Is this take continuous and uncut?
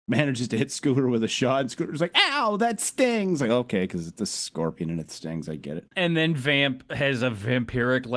yes; 0 cuts

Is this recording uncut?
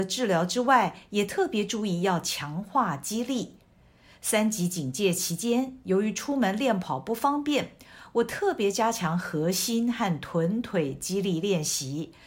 yes; 0 cuts

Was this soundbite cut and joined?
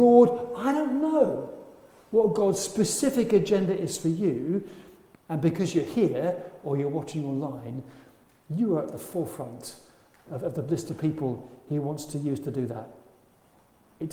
yes; 1 cut; at 5.1 s

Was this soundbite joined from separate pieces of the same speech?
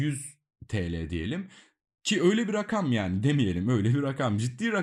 no; 0 cuts

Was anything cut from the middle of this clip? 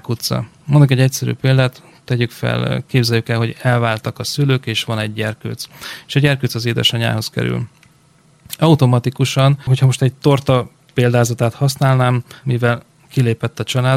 yes; 1 cut; at 12.4 s

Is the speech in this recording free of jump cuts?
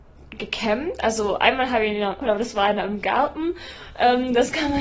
no; 1 cut; at 2.2 s

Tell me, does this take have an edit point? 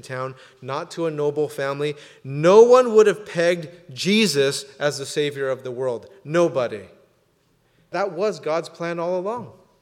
no; 0 cuts

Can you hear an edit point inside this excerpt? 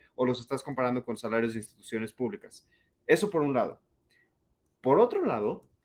no; 0 cuts

